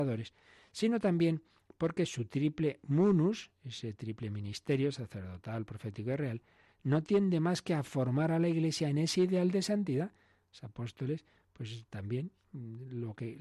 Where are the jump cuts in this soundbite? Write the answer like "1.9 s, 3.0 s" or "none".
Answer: none